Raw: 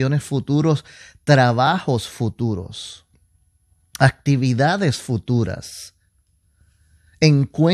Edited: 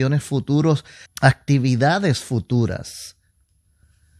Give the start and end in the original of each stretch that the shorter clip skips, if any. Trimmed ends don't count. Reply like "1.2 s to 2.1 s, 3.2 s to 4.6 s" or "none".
1.1 s to 3.8 s